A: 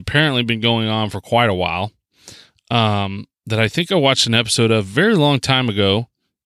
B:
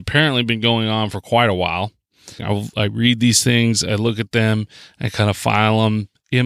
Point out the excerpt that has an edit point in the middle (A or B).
B